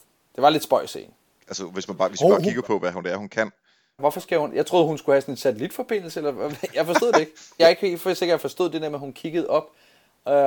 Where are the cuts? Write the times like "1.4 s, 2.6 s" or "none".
4.0 s, 7.6 s